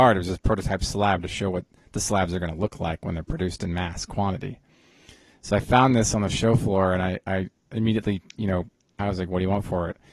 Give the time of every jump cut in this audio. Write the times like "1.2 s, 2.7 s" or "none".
9.0 s